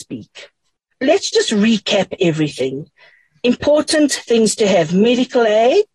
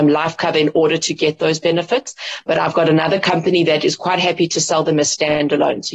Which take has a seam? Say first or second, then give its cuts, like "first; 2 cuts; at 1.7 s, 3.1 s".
first; 1 cut; at 0.9 s